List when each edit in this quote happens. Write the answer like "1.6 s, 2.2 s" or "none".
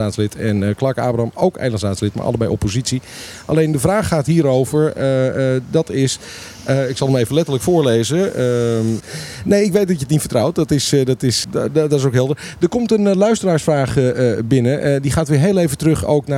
9.0 s, 11.4 s